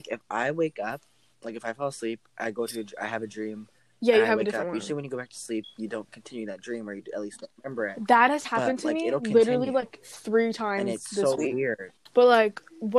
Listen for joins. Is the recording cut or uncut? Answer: uncut